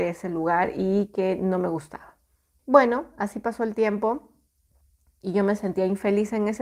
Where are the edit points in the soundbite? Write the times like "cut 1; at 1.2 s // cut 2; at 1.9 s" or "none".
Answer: cut 1; at 2.6 s

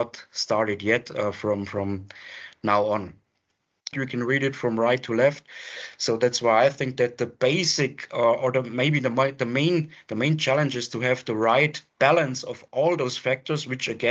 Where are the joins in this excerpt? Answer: cut 1; at 3.9 s // cut 2; at 11.9 s

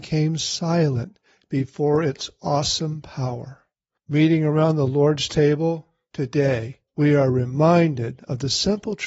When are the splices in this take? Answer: cut 1; at 4.0 s // cut 2; at 6.9 s

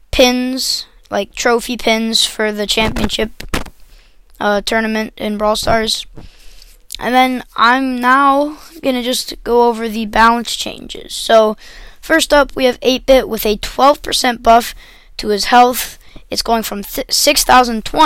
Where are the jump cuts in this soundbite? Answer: none

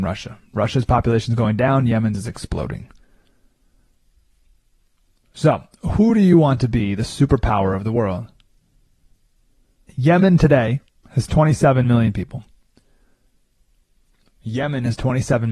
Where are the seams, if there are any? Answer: cut 1; at 9.9 s

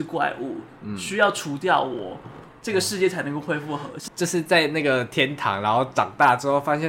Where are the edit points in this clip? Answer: cut 1; at 4.1 s

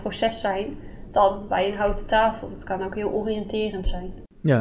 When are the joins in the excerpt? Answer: none

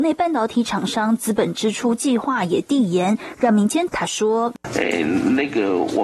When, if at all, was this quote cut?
cut 1; at 3.9 s

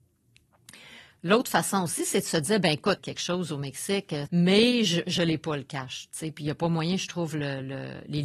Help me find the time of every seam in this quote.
cut 1; at 3.0 s // cut 2; at 4.3 s

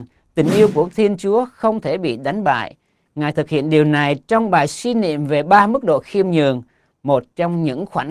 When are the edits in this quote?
cut 1; at 3.1 s

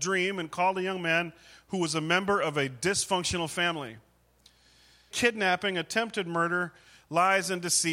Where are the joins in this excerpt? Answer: cut 1; at 5.1 s

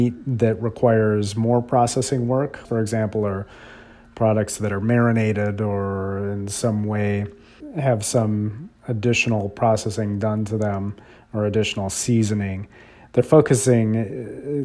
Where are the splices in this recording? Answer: cut 1; at 2.6 s

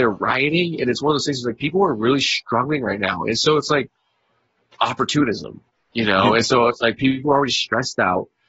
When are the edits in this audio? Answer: none

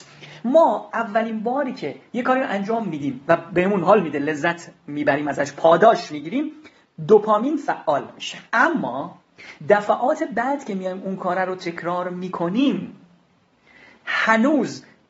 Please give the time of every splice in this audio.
cut 1; at 8.5 s

